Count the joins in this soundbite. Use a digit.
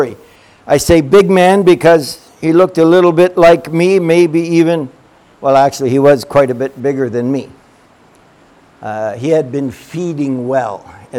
0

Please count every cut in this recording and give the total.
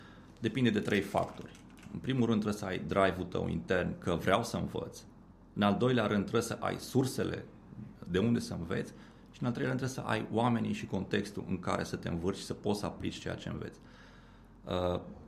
0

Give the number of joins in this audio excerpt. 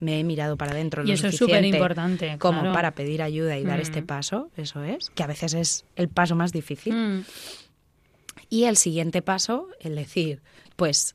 0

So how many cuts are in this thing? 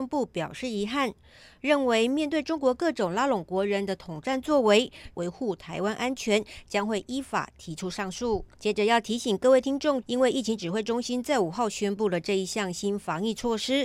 3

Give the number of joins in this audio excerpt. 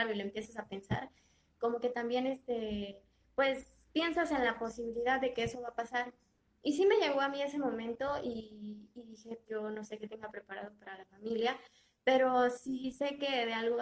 1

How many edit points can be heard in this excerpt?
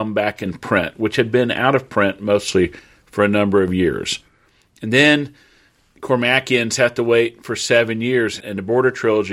1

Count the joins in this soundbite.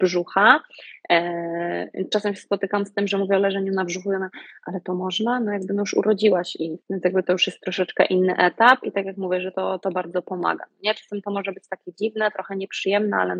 1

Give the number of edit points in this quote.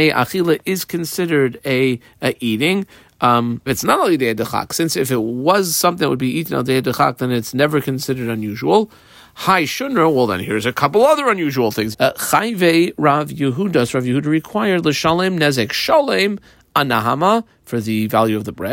2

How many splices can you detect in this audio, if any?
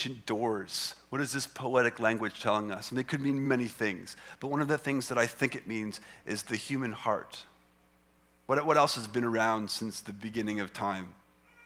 1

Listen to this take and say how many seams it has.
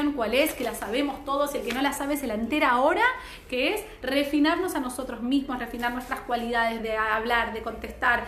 1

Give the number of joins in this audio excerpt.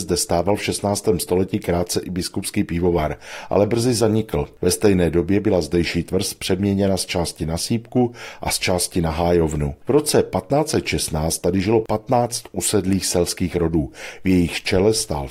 0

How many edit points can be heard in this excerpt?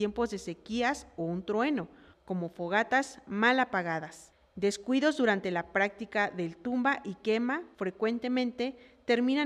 1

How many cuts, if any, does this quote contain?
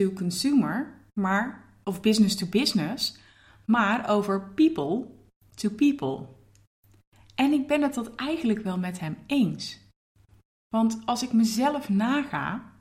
0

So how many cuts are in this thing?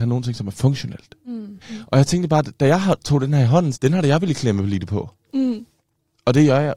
2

